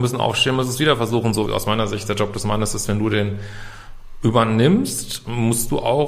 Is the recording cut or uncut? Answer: cut